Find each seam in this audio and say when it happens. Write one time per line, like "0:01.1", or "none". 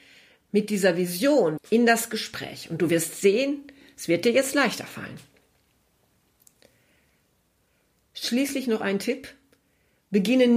0:01.6